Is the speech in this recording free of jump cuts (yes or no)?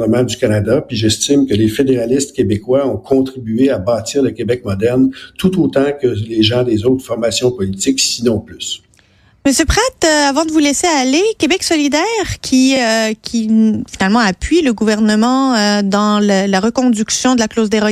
yes